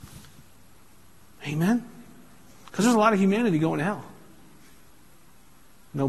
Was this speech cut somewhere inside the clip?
no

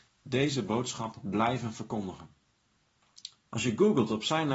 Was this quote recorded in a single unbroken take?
no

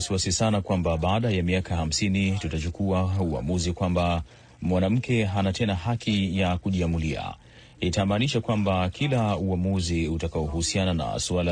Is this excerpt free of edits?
yes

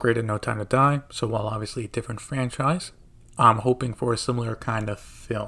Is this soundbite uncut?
yes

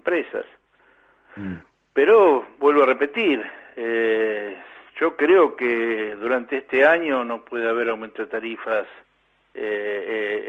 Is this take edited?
no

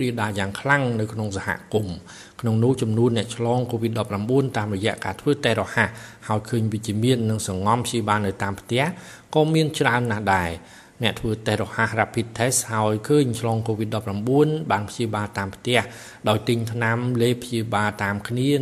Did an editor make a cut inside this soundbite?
no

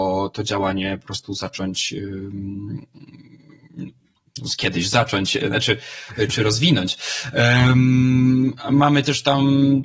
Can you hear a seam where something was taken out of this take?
no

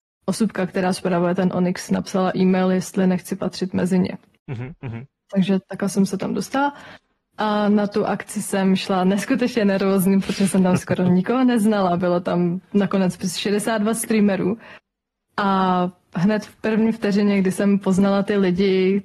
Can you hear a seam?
no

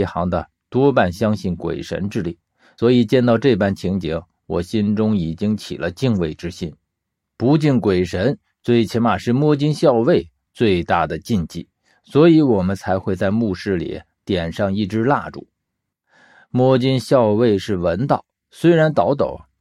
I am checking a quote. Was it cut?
no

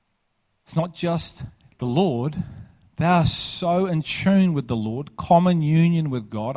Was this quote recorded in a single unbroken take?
yes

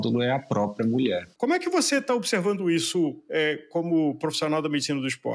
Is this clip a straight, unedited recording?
no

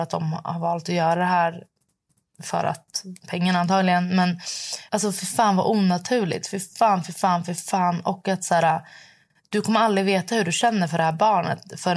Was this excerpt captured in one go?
yes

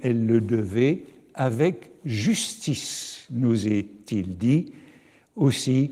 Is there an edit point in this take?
no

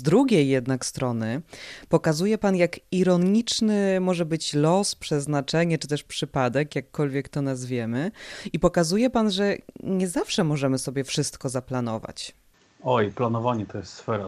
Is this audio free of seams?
yes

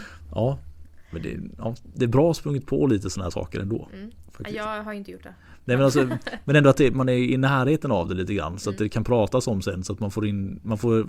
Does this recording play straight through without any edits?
yes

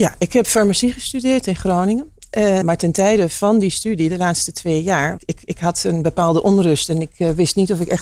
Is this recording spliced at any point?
yes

